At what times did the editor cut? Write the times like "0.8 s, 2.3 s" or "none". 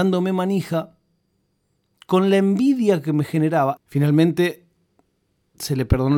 3.8 s

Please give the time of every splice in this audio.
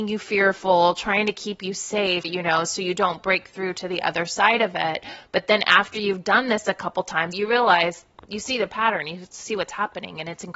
2.2 s, 7.3 s

